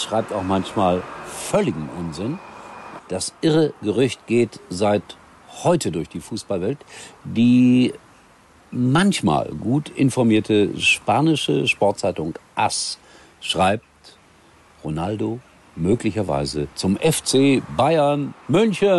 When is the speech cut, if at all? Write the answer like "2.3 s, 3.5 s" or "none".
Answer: 3.0 s, 16.7 s